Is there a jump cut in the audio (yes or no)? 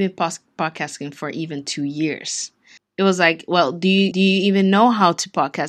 yes